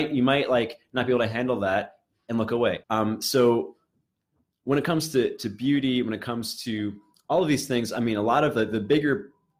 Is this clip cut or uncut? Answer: cut